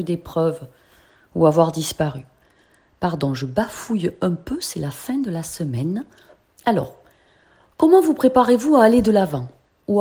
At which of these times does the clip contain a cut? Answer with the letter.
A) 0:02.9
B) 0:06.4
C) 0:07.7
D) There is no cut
B